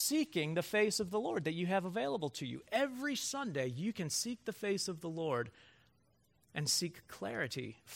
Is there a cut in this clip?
no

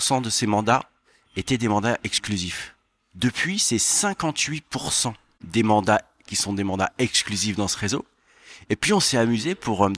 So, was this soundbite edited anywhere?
yes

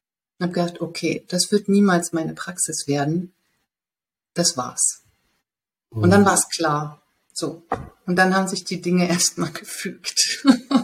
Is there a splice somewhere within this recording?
no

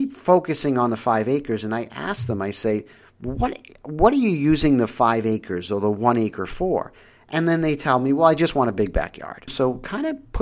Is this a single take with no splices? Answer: no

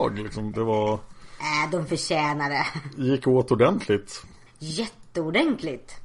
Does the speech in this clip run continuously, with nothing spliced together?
yes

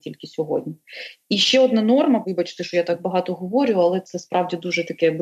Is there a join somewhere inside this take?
yes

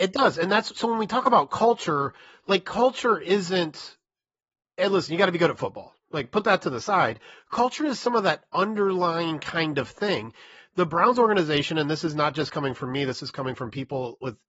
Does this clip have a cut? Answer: no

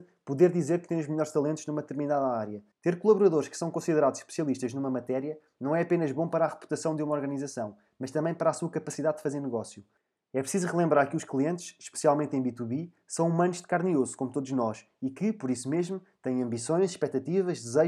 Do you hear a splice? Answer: yes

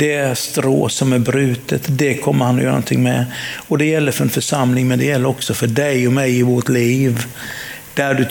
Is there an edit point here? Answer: no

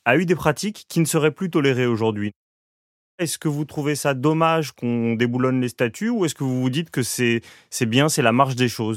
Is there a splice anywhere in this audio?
no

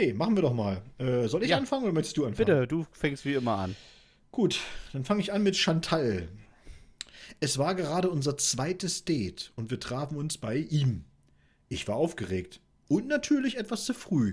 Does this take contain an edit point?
no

